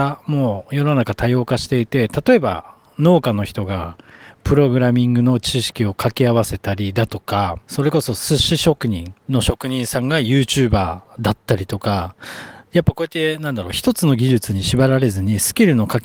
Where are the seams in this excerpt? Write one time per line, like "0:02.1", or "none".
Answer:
0:07.6
0:09.2

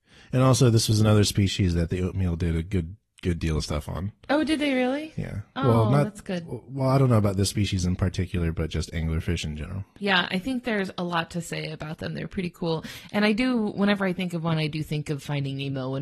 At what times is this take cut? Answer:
none

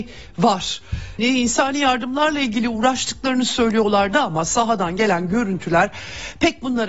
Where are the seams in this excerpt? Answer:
0:01.2

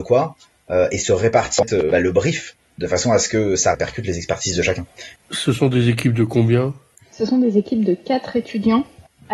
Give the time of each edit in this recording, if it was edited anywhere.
0:05.2

